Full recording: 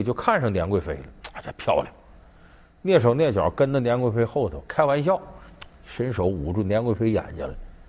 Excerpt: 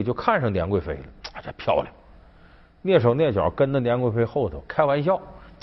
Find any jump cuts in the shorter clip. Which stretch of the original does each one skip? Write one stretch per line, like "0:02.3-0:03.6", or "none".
none